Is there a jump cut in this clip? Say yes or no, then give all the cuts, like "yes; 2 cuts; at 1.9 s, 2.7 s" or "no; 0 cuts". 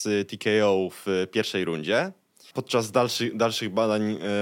yes; 1 cut; at 2.5 s